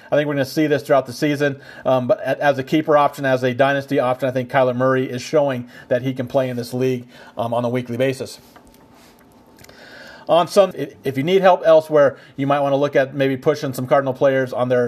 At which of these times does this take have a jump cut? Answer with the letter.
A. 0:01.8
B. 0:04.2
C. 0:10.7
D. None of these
C